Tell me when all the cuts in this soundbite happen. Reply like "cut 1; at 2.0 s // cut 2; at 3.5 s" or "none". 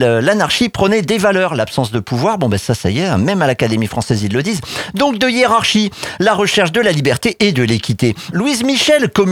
cut 1; at 8.3 s